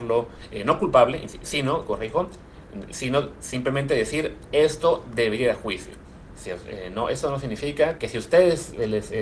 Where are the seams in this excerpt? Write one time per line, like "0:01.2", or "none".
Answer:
0:06.3
0:08.0